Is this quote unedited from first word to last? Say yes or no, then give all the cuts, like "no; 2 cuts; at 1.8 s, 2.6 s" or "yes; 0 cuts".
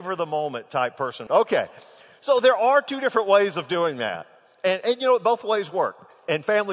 no; 1 cut; at 1.3 s